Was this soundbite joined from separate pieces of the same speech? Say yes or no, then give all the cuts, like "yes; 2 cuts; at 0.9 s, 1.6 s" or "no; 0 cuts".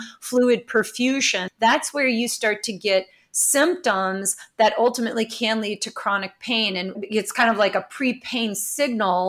yes; 2 cuts; at 1.5 s, 6.9 s